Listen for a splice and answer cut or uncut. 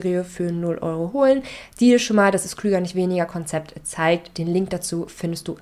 uncut